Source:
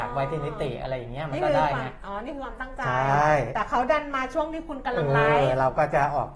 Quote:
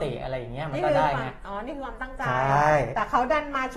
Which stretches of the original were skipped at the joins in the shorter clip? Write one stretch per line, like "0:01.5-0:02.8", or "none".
none

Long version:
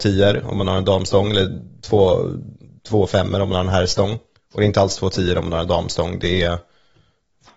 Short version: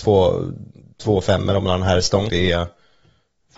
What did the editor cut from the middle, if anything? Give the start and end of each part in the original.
0:04.1-0:06.2

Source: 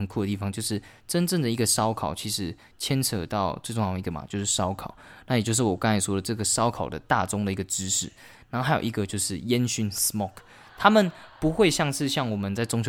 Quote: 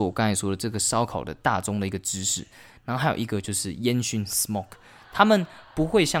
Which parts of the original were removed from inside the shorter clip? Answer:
none

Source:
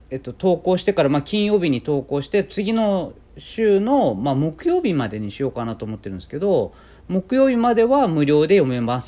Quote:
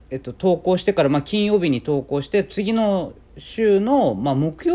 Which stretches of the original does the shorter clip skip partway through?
none

